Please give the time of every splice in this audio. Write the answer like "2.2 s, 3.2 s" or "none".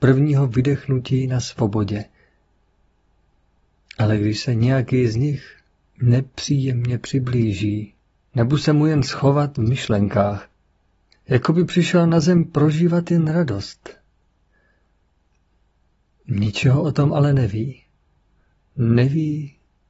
8.2 s